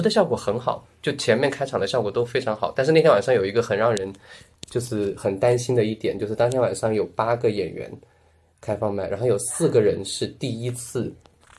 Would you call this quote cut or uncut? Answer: uncut